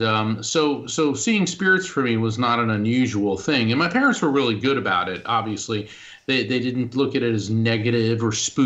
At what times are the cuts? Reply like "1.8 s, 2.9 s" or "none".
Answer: none